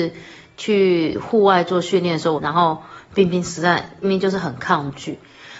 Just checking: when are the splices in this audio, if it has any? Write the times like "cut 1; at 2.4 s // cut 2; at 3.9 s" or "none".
cut 1; at 2.3 s // cut 2; at 4.0 s